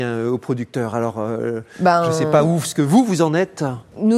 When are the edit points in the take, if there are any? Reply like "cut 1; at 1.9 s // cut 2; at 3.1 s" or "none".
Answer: none

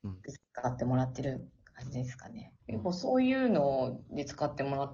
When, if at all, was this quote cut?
cut 1; at 2.6 s

